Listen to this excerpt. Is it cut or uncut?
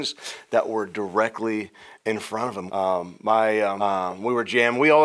cut